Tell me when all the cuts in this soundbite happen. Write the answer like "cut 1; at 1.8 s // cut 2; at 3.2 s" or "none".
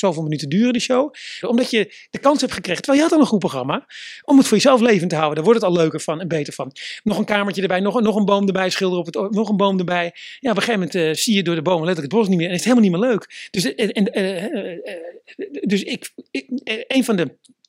cut 1; at 1.4 s // cut 2; at 7.0 s